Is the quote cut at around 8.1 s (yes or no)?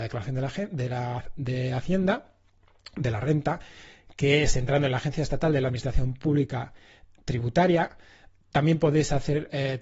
no